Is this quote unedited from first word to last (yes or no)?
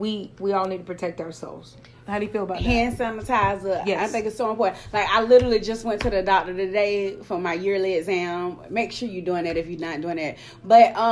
yes